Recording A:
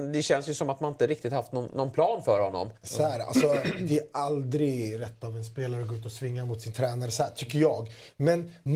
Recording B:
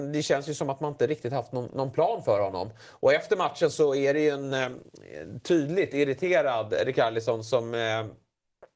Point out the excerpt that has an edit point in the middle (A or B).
A